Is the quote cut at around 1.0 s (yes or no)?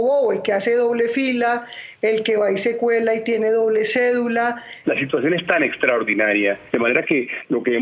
no